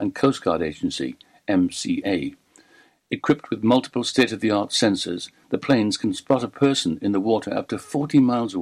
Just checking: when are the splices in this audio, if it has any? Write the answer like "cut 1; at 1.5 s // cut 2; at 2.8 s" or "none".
none